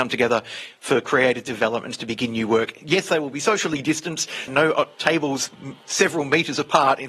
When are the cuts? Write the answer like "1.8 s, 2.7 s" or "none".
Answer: 4.5 s